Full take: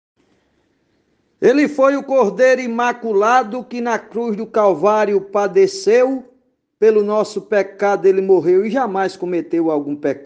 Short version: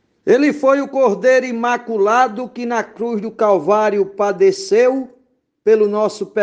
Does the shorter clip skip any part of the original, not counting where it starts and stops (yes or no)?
no